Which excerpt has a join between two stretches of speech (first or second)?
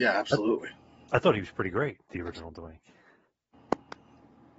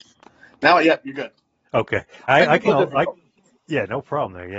second